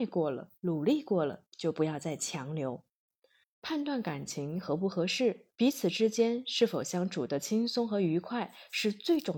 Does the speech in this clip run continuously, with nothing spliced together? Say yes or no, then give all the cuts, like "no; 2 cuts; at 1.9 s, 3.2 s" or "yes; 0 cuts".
no; 2 cuts; at 3.4 s, 5.5 s